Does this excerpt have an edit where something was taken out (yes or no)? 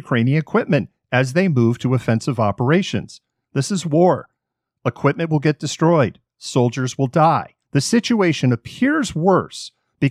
yes